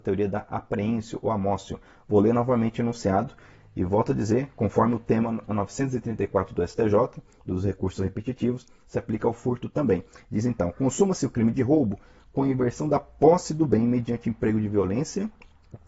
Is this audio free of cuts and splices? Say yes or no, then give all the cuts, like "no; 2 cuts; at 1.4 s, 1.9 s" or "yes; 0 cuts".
yes; 0 cuts